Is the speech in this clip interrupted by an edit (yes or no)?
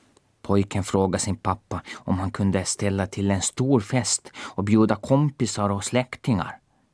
no